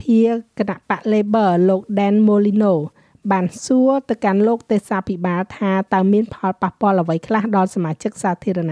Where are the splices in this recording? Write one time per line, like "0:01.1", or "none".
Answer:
none